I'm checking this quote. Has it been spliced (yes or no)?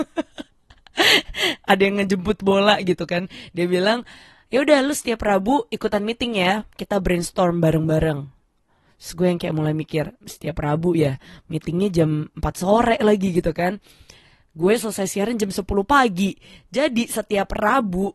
yes